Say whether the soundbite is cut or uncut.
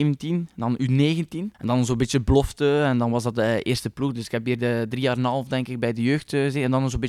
cut